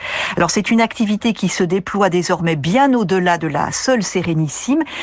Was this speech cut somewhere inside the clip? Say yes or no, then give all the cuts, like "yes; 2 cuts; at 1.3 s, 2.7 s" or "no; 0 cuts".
no; 0 cuts